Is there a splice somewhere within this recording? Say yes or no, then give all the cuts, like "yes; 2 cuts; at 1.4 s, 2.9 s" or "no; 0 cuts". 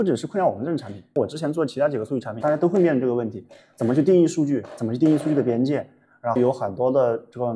yes; 1 cut; at 2.4 s